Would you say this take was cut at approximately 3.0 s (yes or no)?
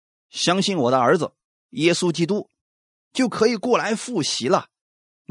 yes